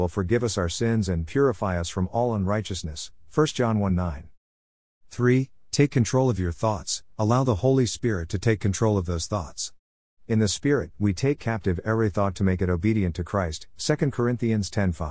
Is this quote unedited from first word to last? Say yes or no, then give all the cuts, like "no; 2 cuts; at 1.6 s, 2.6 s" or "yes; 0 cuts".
no; 1 cut; at 7.1 s